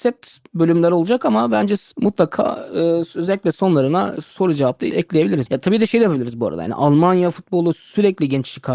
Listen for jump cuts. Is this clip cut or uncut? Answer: cut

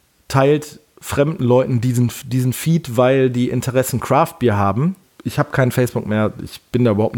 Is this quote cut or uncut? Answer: cut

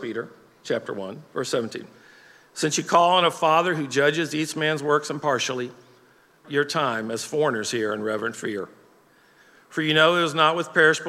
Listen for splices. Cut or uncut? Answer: cut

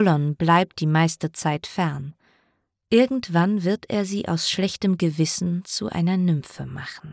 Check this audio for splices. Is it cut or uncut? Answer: uncut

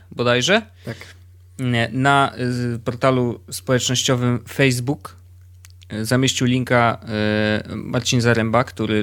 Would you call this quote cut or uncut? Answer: uncut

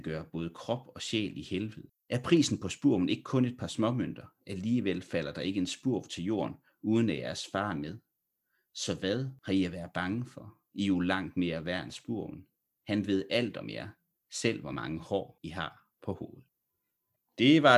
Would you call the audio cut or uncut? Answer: uncut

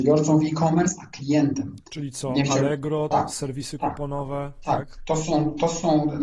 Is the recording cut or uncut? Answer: cut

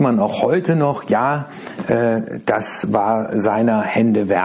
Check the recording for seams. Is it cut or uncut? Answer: uncut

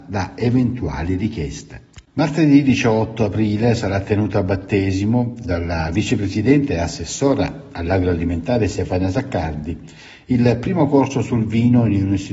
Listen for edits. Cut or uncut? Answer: cut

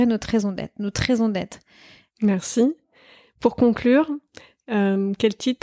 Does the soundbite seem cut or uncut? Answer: cut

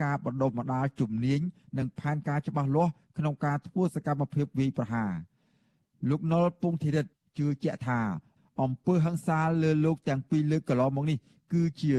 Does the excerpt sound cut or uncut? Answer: uncut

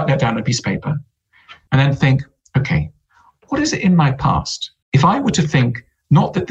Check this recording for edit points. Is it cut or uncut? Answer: cut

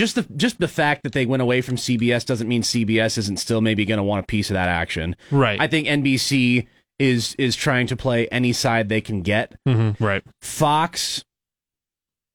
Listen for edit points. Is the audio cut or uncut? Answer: cut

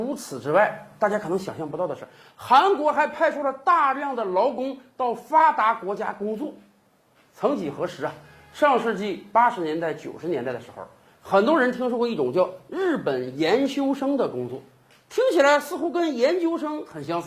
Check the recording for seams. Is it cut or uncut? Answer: uncut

